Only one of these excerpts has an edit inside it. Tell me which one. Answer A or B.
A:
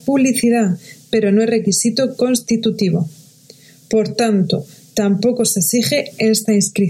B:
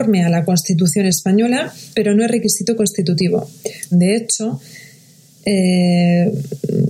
B